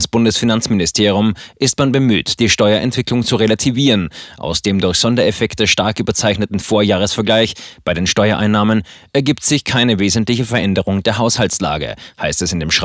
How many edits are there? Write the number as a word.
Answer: zero